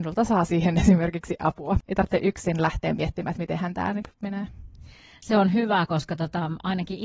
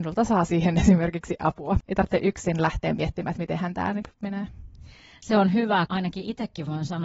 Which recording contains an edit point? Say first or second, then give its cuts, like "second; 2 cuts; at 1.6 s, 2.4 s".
second; 1 cut; at 5.9 s